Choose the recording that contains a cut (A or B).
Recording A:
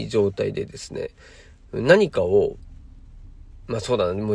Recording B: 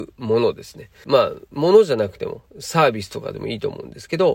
B